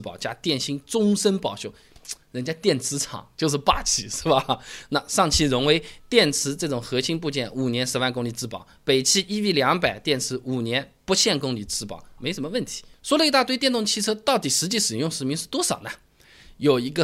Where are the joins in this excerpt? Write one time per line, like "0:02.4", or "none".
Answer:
0:12.2

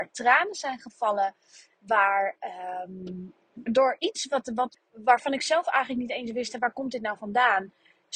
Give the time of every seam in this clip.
0:03.7
0:04.7

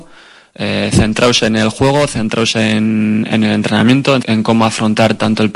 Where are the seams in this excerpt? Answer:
0:04.2

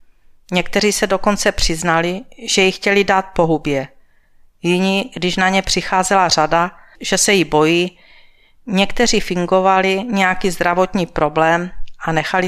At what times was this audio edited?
0:06.9

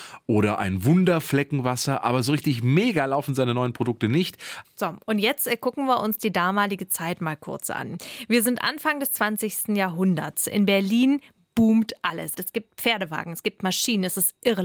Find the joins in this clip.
0:04.6
0:12.3

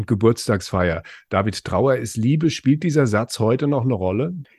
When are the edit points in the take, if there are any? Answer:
none

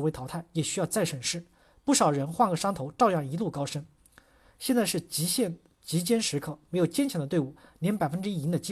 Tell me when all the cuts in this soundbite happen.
none

